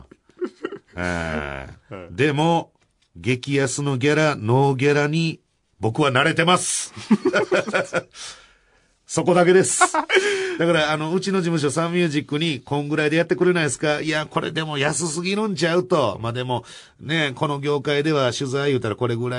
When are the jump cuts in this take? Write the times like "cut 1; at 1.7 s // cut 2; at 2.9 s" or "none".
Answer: none